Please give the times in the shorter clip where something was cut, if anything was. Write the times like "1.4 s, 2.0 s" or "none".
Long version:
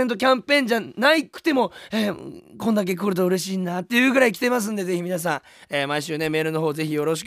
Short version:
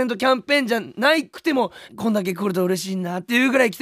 1.9 s